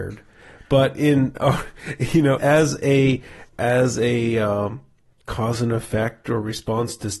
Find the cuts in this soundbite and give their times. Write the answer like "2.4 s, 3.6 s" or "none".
2.4 s, 3.5 s